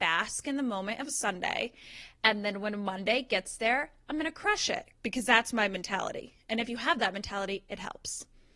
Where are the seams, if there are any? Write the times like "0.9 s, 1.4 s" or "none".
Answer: 4.9 s